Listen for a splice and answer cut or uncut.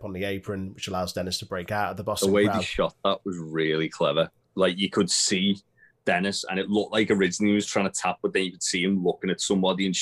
cut